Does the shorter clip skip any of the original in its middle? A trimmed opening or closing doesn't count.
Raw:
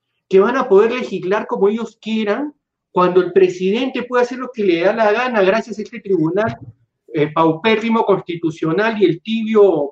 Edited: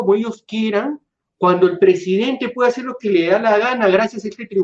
no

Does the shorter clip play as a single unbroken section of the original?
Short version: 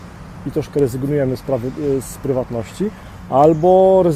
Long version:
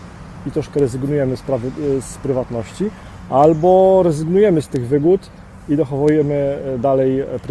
yes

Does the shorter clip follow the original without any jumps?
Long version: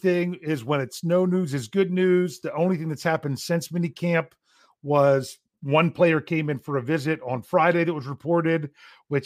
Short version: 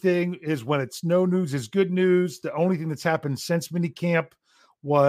yes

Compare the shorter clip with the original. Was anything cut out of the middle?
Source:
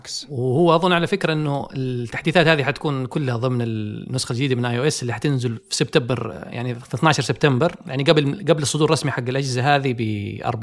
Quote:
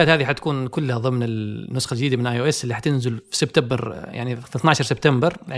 no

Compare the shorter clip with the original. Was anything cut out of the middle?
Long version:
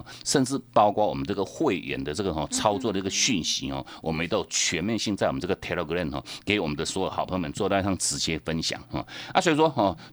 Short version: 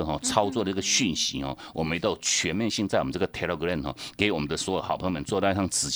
no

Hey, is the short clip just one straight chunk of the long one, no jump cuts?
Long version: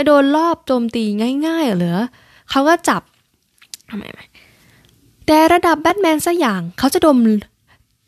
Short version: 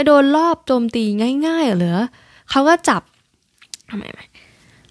yes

